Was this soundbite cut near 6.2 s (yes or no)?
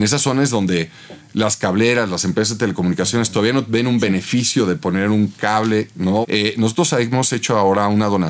yes